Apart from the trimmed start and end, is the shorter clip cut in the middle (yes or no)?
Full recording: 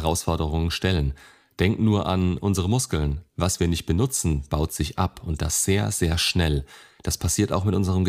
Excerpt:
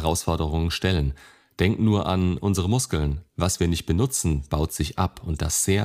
no